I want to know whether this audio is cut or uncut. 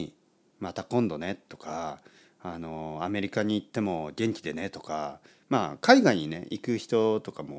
uncut